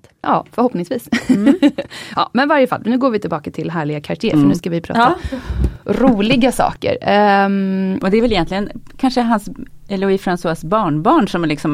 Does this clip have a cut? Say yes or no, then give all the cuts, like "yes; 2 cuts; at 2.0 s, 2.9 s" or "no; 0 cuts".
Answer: no; 0 cuts